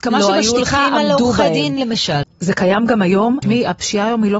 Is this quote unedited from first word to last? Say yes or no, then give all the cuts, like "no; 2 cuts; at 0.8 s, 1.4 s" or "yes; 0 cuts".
no; 2 cuts; at 2.2 s, 3.4 s